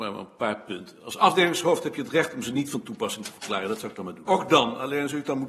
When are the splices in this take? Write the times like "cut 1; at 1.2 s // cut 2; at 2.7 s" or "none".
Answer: cut 1; at 4.3 s

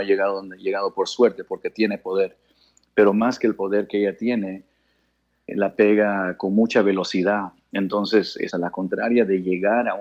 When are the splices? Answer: cut 1; at 5.5 s // cut 2; at 8.5 s

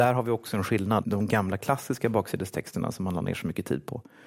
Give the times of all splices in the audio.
cut 1; at 1.0 s

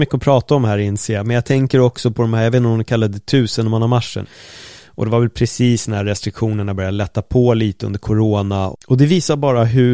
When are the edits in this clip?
cut 1; at 4.2 s // cut 2; at 8.7 s

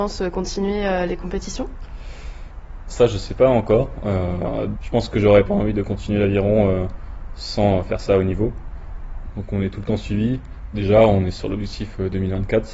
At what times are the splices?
cut 1; at 4.7 s // cut 2; at 9.3 s // cut 3; at 10.7 s

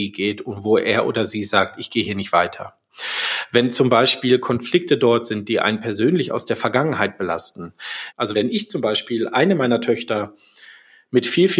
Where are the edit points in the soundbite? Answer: cut 1; at 8.1 s

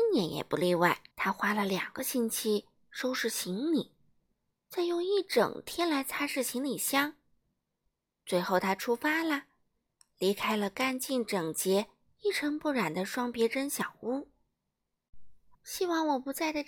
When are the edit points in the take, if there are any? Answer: cut 1; at 1.1 s // cut 2; at 15.5 s

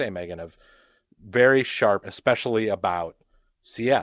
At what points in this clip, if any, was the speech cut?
cut 1; at 2.0 s

